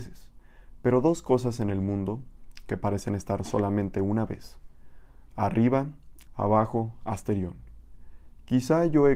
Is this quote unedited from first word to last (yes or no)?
no